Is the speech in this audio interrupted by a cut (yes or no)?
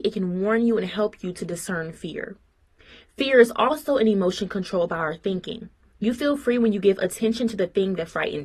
no